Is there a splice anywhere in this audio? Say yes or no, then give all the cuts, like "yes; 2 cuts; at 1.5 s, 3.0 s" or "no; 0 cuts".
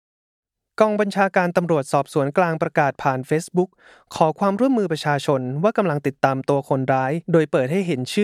yes; 1 cut; at 7.2 s